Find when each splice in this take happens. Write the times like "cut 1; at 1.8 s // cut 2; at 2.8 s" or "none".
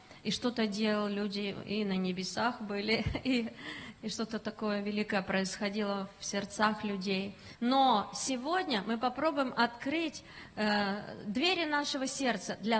cut 1; at 7.5 s